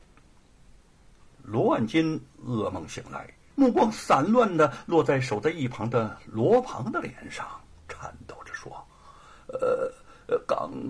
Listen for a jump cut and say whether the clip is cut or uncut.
cut